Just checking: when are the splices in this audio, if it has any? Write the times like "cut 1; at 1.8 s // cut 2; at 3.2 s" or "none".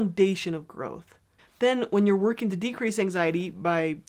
cut 1; at 1.4 s